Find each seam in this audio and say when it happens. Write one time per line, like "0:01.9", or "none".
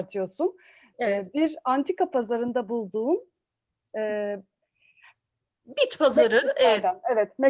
none